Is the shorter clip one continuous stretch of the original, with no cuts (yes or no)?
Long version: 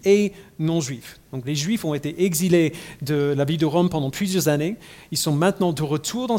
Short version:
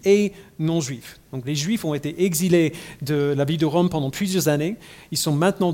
yes